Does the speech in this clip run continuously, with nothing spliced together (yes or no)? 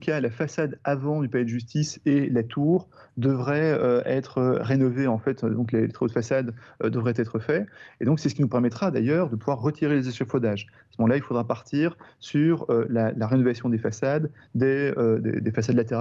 yes